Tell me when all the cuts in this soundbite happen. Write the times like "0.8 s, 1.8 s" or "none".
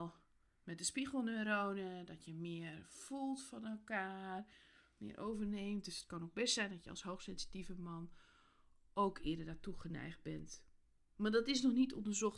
none